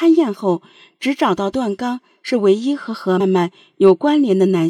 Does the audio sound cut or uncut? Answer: cut